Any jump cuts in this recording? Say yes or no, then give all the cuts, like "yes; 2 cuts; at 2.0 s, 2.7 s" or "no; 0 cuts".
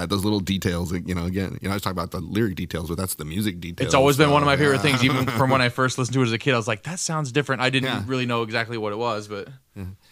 no; 0 cuts